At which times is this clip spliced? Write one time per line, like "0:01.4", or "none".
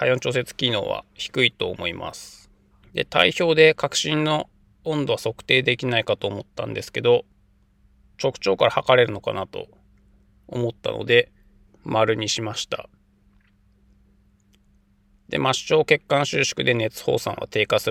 0:02.8
0:11.7